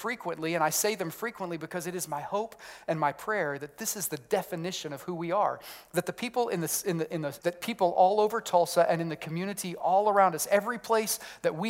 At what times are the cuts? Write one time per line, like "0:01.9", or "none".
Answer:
0:07.4

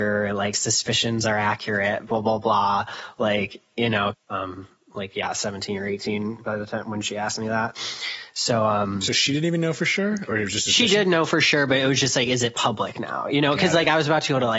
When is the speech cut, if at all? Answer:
0:04.1

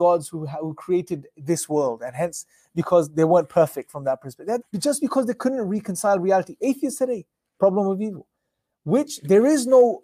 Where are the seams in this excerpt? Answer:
0:04.6
0:07.6

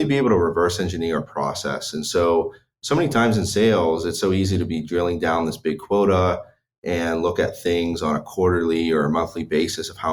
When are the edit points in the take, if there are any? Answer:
none

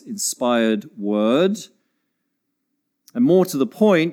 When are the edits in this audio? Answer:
none

